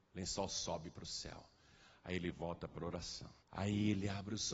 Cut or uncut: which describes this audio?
cut